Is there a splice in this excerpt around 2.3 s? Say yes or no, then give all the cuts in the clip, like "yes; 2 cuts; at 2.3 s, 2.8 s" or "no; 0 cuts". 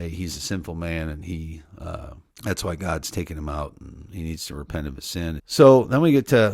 yes; 2 cuts; at 2.3 s, 5.4 s